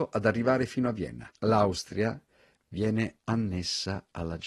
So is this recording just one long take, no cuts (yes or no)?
no